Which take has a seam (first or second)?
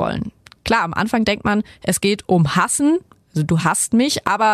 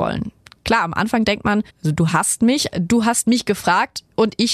second